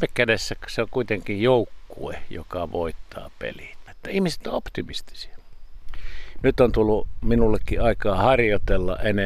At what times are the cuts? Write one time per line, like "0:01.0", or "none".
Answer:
0:03.9
0:06.4

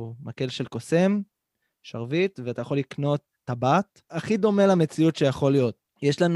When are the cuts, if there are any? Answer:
none

